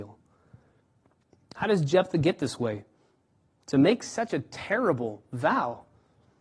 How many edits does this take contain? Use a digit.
0